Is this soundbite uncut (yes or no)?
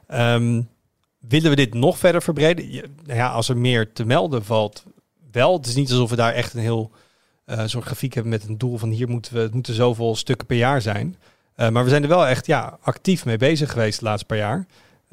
yes